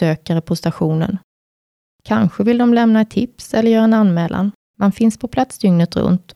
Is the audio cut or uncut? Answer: cut